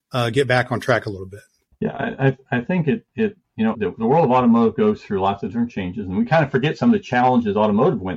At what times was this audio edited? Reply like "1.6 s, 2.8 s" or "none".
3.7 s